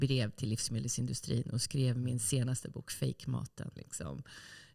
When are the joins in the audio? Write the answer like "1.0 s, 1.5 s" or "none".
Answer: 3.8 s